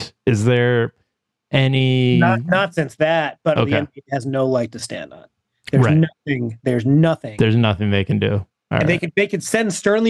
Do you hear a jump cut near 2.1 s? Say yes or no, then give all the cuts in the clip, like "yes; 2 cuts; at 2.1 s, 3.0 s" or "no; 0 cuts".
no; 1 cut; at 3.6 s